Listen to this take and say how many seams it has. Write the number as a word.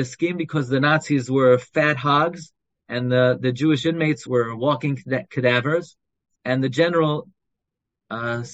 two